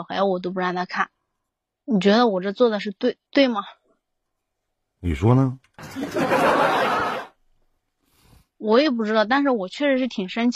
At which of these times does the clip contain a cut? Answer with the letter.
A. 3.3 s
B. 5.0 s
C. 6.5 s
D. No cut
A